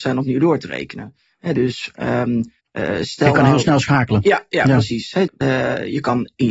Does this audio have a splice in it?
yes; 2 cuts; at 2.6 s, 5.3 s

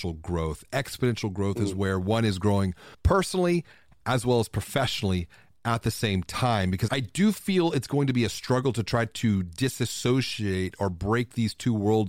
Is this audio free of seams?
no; 2 cuts; at 2.9 s, 6.9 s

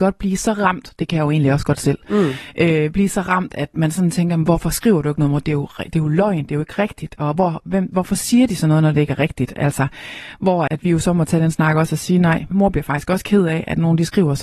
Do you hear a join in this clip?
yes; 2 cuts; at 10.7 s, 12.5 s

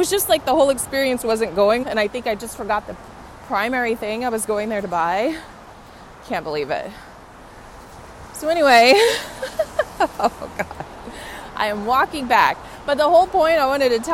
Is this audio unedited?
no; 1 cut; at 1.8 s

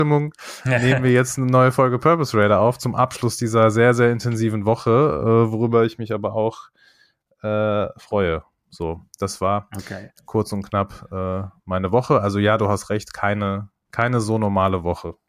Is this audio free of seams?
yes; 0 cuts

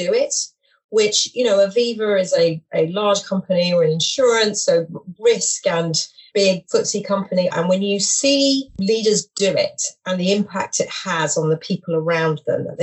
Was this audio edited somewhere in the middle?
yes; 1 cut; at 7.5 s

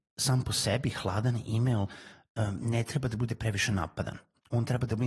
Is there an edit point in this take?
no; 0 cuts

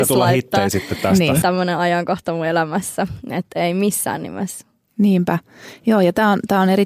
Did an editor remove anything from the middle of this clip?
yes; 1 cut; at 1.4 s

